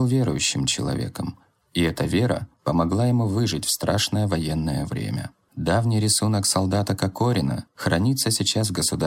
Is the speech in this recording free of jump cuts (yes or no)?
no